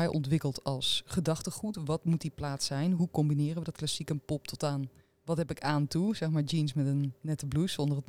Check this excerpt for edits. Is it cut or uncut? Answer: uncut